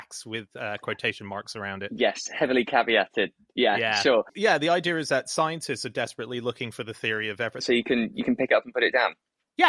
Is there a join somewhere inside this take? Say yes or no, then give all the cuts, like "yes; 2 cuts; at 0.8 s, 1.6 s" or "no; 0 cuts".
yes; 1 cut; at 7.6 s